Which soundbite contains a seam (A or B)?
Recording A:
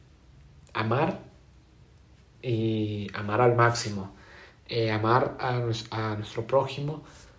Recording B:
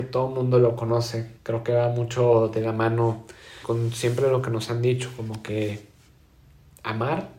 B